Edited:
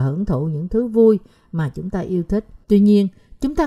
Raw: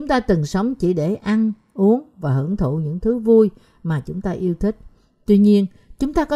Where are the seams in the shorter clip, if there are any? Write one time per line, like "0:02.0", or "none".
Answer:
0:02.6